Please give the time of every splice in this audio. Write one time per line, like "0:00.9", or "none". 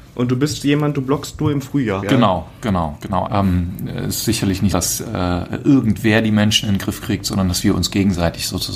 0:02.0
0:03.2
0:04.7